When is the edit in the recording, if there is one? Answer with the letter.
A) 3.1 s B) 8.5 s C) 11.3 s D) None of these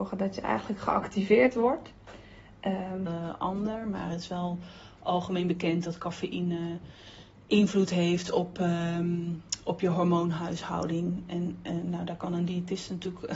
A